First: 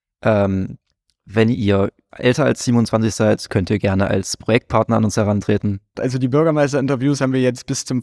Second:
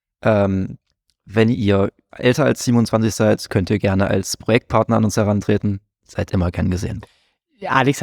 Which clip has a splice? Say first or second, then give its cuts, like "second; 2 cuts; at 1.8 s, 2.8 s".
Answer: first; 1 cut; at 5.9 s